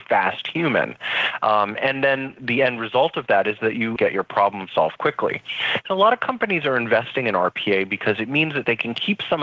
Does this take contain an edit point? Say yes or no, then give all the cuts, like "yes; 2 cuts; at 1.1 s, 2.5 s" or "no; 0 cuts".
yes; 1 cut; at 4.0 s